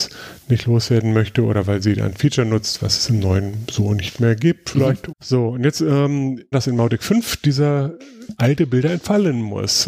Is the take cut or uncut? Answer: cut